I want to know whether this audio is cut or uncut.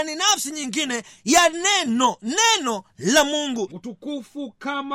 cut